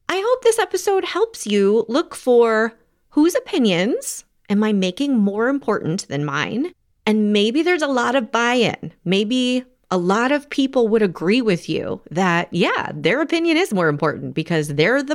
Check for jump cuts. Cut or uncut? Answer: uncut